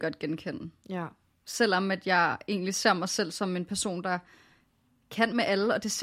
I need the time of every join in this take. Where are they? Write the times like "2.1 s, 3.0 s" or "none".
none